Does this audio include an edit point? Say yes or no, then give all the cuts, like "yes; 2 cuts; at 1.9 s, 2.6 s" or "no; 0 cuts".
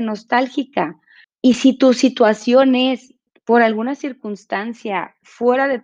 yes; 1 cut; at 1.2 s